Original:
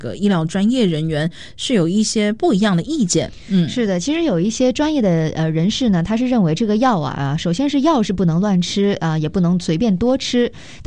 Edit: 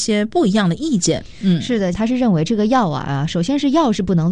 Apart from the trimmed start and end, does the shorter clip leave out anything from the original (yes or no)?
yes